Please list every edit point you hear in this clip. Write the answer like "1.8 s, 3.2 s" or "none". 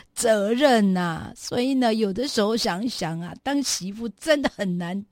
none